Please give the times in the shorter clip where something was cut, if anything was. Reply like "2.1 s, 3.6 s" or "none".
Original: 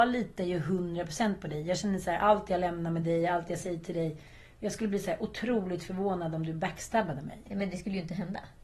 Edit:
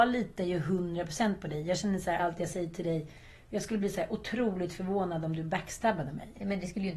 2.2 s